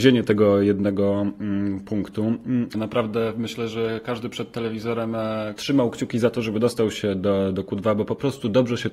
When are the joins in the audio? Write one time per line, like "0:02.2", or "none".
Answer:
0:02.7
0:05.6